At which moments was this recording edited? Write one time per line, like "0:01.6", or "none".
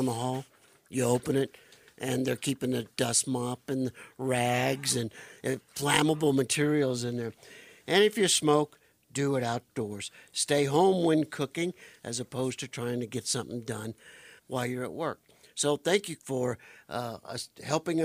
0:14.4
0:16.2